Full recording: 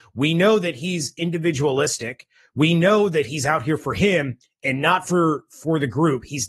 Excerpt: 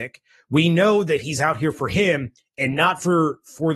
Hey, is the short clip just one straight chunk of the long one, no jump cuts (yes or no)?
yes